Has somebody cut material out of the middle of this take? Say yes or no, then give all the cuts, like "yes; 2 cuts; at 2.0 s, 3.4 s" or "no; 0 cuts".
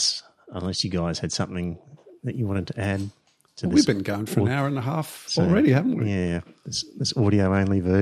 no; 0 cuts